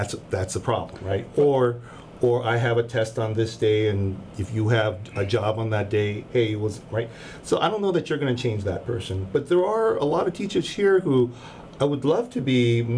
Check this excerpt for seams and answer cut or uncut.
uncut